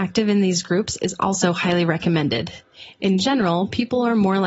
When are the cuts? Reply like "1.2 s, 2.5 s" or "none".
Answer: none